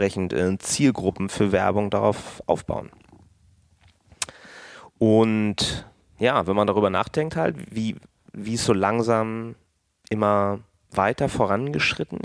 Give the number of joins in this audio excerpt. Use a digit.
0